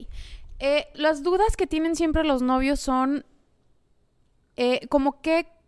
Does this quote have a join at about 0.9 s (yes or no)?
yes